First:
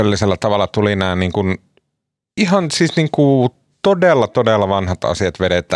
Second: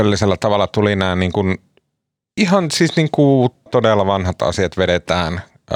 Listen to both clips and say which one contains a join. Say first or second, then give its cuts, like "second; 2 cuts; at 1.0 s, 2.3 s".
second; 1 cut; at 3.7 s